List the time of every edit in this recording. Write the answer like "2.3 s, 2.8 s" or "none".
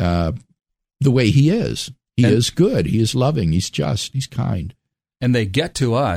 none